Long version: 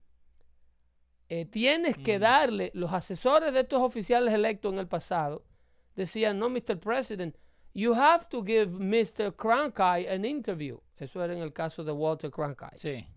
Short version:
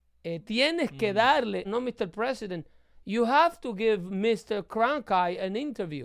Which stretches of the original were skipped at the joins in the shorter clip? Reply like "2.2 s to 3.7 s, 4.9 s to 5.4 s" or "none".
2.7 s to 6.3 s